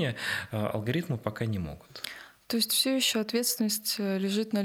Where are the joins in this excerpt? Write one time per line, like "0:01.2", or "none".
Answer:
none